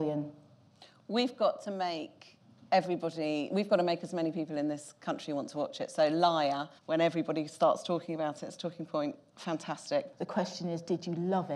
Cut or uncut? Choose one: cut